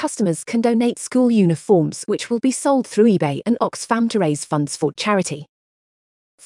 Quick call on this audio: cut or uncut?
uncut